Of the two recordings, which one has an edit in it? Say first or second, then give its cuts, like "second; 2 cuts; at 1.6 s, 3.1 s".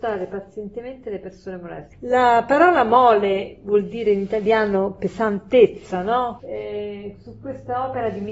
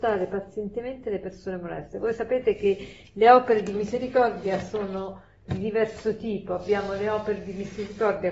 first; 2 cuts; at 1.9 s, 6.4 s